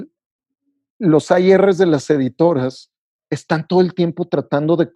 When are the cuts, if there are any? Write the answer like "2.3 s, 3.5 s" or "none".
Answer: none